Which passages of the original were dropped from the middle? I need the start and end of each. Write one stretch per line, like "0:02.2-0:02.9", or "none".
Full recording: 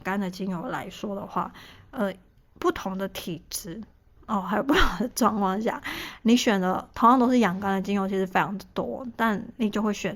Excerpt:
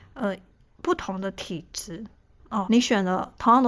0:04.4-0:06.2